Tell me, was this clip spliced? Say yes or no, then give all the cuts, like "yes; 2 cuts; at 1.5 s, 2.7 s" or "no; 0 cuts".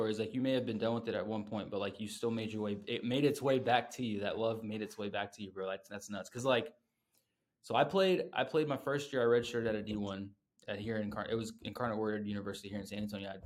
no; 0 cuts